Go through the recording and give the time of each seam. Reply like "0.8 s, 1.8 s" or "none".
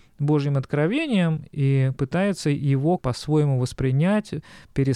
3.0 s